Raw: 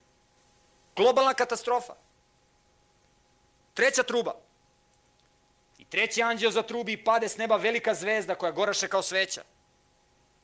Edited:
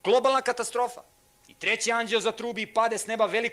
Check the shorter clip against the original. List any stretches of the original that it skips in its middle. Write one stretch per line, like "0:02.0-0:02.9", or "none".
0:02.3-0:05.7